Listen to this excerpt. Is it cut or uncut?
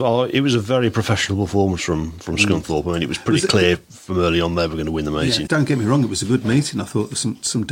cut